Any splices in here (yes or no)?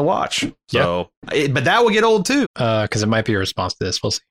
yes